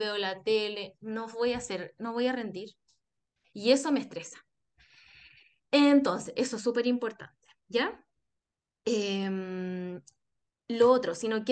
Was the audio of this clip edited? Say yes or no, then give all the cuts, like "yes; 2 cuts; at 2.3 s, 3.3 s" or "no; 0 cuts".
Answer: no; 0 cuts